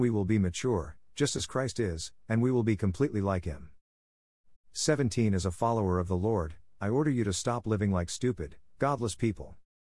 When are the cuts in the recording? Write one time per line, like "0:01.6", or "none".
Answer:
0:04.5